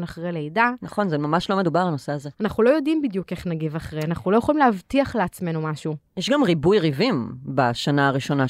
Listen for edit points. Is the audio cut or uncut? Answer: cut